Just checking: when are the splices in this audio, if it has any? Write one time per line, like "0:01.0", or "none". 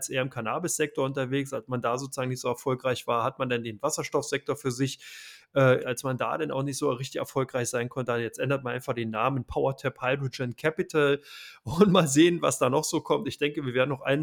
0:05.8